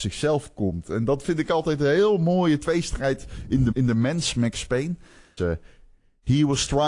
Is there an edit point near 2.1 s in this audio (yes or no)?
no